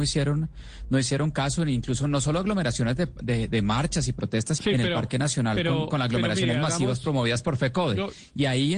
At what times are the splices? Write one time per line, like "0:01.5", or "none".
0:04.6